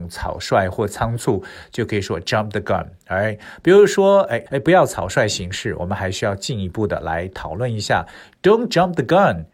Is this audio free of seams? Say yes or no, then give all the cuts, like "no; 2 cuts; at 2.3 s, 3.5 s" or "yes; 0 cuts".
no; 1 cut; at 4.5 s